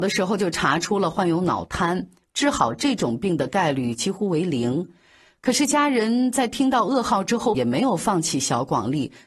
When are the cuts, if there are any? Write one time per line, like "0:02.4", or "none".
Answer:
0:02.2
0:07.5